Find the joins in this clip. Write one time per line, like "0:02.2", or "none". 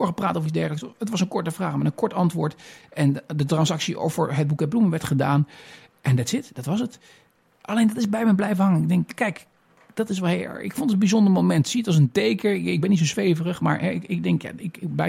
none